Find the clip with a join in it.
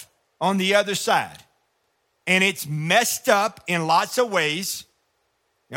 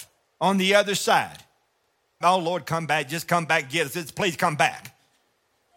second; 1 cut; at 2.2 s

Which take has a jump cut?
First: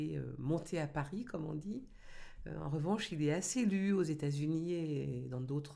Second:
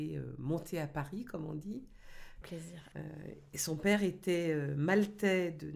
second; 1 cut; at 2.4 s

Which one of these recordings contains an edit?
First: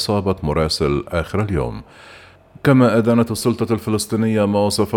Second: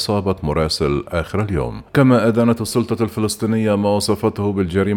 second; 1 cut; at 1.9 s

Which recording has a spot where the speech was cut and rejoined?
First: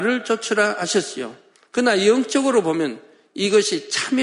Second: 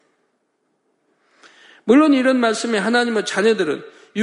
first; 1 cut; at 1.5 s

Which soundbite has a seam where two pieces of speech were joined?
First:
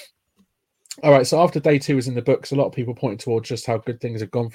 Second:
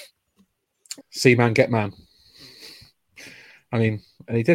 second; 1 cut; at 1.0 s

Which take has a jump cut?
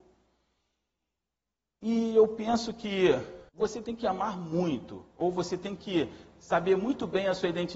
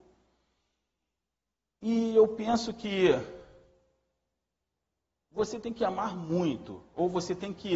first; 1 cut; at 3.5 s

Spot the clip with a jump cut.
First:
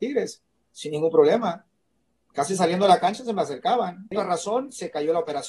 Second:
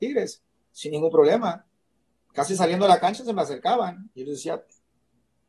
first; 1 cut; at 4.1 s

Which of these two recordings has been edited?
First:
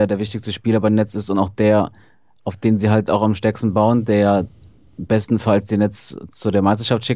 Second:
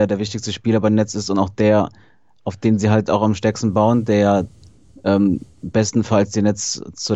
first; 1 cut; at 4.9 s

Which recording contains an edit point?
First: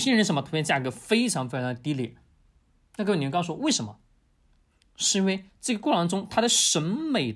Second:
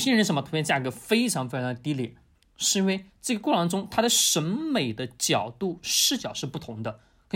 second; 1 cut; at 2.3 s

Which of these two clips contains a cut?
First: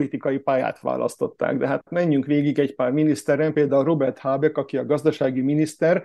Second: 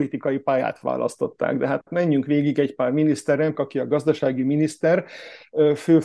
second; 1 cut; at 3.6 s

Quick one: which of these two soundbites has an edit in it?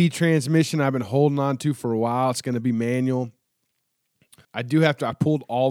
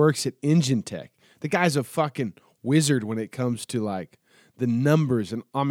first; 1 cut; at 4.4 s

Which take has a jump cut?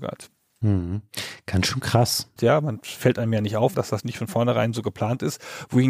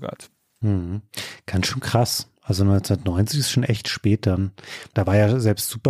first; 2 cuts; at 2.4 s, 3.7 s

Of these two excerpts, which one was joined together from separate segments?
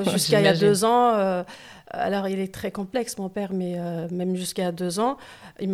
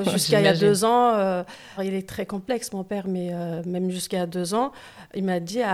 second; 1 cut; at 1.8 s

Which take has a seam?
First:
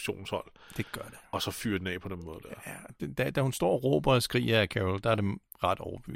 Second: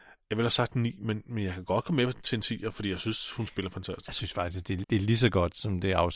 second; 1 cut; at 4.8 s

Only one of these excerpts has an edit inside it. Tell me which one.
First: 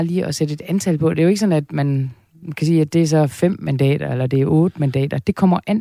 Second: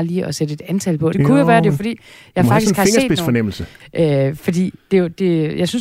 second; 2 cuts; at 1.1 s, 3.8 s

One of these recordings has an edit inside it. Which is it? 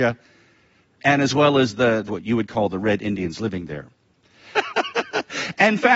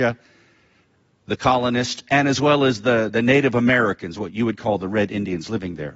first; 3 cuts; at 1.0 s, 2.1 s, 4.5 s

